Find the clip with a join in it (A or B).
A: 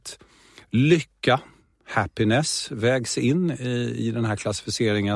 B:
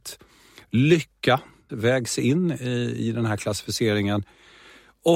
B